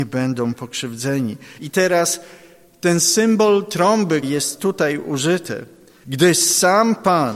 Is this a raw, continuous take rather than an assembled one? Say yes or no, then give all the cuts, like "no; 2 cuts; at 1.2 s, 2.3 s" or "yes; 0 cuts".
no; 3 cuts; at 1.6 s, 4.2 s, 6.0 s